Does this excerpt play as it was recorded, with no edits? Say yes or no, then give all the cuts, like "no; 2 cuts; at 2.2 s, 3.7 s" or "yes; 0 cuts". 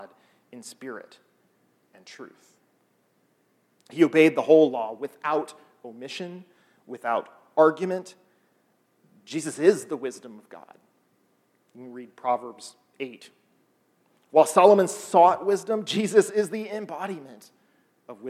yes; 0 cuts